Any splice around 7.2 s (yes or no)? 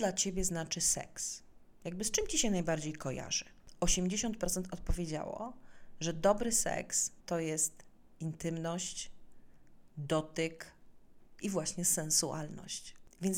yes